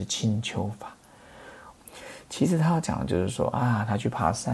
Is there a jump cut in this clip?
yes; 1 cut; at 1.8 s

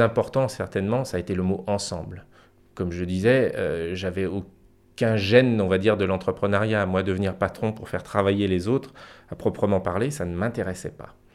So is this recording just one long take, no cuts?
yes; 0 cuts

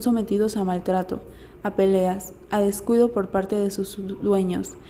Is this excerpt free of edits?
yes; 0 cuts

